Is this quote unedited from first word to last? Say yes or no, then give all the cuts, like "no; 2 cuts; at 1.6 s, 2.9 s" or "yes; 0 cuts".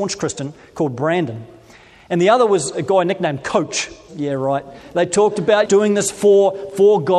no; 2 cuts; at 4.1 s, 5.7 s